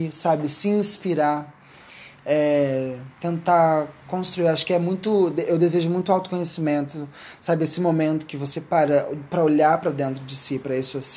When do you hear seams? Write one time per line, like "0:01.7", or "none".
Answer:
0:03.1